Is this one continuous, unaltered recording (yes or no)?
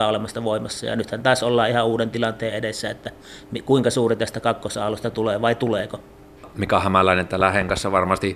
yes